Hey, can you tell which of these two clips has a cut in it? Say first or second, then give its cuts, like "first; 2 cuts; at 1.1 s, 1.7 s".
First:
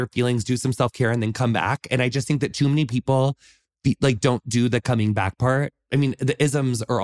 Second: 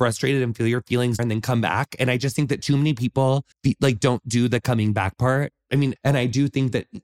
second; 3 cuts; at 1.2 s, 3.5 s, 6.0 s